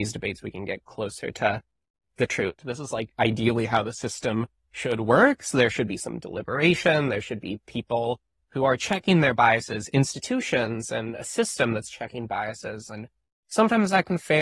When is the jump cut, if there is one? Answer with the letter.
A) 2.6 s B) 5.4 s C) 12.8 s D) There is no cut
A